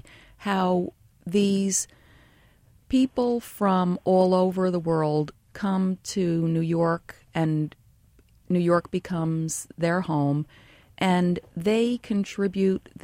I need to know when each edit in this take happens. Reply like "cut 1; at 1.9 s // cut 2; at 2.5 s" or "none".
none